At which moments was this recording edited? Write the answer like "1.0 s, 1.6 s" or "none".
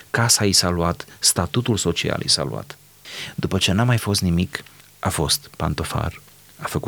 none